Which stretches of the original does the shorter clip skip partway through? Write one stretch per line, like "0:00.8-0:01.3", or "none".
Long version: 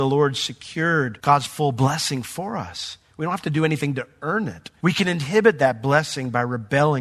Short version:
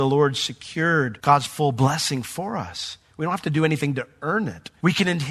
none